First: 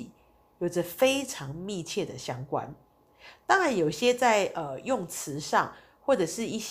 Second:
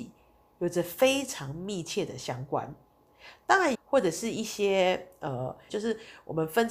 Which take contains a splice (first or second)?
second